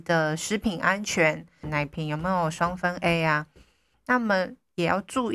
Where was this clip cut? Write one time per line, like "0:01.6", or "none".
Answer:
0:01.6
0:03.9